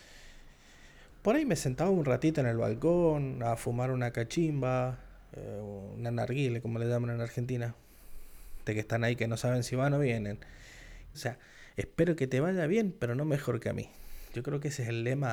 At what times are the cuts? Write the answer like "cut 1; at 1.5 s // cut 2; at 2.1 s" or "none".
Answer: cut 1; at 8.7 s // cut 2; at 11.1 s